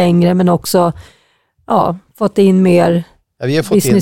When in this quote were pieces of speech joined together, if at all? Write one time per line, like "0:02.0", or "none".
none